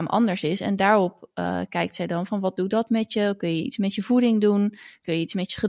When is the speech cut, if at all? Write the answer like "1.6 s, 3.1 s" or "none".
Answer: none